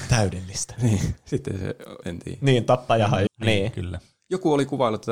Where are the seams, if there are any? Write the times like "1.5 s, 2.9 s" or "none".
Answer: 2.0 s, 3.3 s